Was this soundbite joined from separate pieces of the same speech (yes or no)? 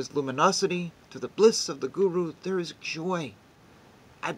no